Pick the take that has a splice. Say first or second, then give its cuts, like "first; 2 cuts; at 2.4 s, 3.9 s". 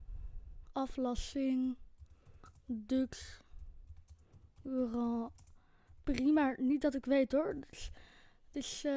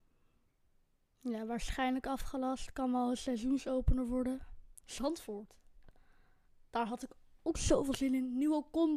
second; 1 cut; at 4.8 s